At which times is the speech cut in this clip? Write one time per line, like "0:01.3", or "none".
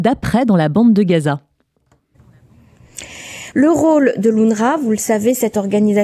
0:03.5

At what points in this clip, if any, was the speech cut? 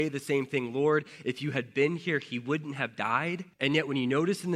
0:03.5

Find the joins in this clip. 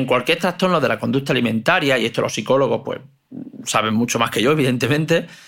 none

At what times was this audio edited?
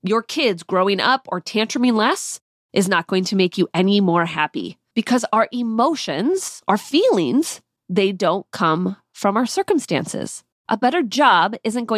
0:04.9
0:10.5

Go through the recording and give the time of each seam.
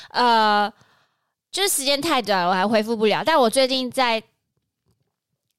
none

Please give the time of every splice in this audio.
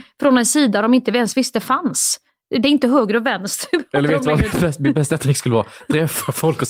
none

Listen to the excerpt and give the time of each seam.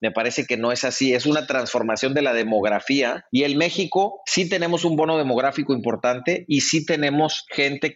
none

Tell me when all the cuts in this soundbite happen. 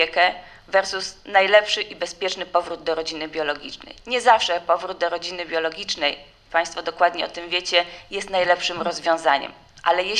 none

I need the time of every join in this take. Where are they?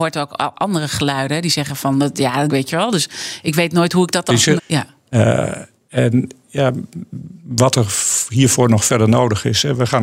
0:02.5
0:04.6

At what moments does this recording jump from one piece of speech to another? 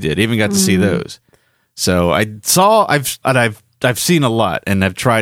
0:03.2

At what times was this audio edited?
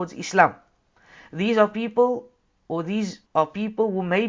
0:03.2

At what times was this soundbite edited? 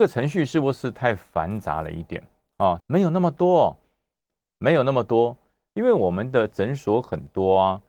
0:02.8
0:05.7

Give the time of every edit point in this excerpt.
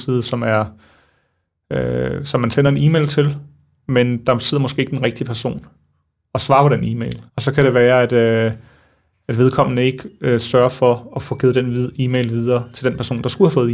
0:07.3

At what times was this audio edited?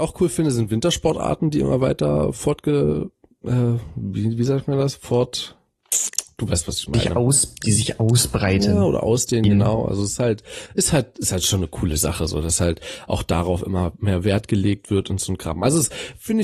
none

